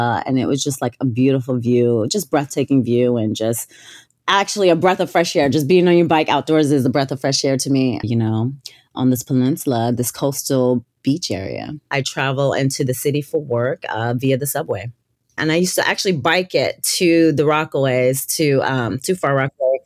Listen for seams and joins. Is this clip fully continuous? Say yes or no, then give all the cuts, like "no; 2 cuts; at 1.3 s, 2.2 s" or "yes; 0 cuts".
no; 2 cuts; at 8.0 s, 11.9 s